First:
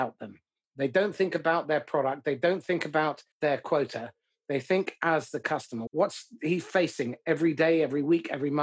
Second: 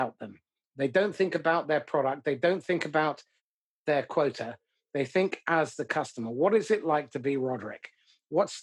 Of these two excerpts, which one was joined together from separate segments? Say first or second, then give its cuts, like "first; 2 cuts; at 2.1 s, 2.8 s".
first; 2 cuts; at 3.3 s, 5.9 s